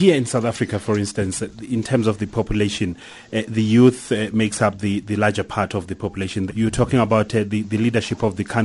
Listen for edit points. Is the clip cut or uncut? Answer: cut